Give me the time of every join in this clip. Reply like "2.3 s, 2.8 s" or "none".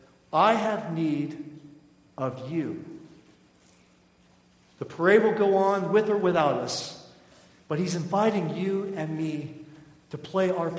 none